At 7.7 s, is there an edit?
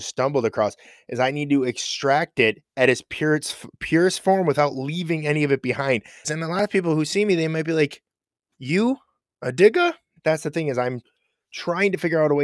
no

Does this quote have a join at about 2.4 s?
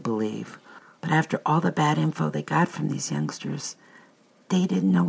no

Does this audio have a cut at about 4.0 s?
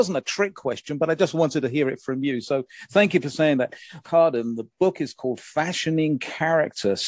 yes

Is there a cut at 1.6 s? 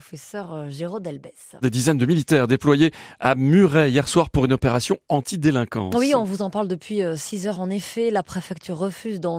yes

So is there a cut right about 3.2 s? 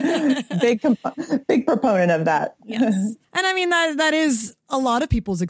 yes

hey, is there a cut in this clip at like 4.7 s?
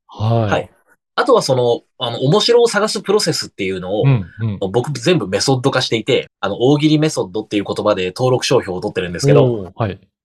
no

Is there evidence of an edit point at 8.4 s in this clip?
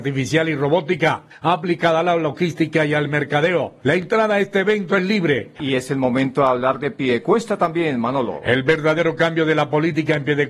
no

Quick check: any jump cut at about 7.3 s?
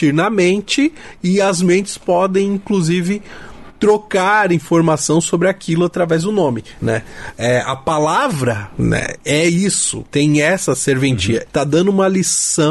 no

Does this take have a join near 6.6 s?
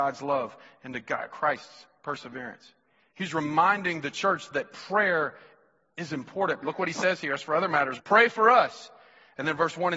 yes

